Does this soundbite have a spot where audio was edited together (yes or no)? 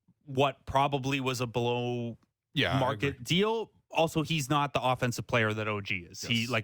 no